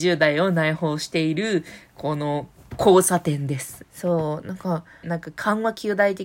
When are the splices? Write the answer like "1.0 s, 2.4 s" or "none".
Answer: 3.8 s, 5.0 s